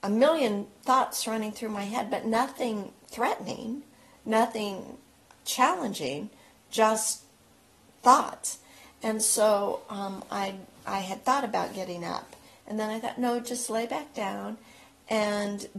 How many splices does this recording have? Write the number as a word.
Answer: zero